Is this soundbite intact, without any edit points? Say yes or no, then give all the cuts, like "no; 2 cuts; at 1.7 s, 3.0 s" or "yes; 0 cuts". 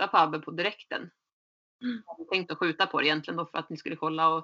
yes; 0 cuts